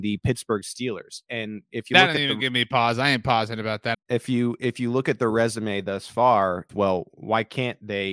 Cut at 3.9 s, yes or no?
yes